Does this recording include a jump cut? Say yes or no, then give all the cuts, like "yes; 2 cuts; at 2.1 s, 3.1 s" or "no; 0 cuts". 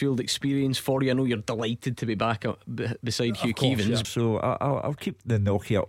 yes; 1 cut; at 4.0 s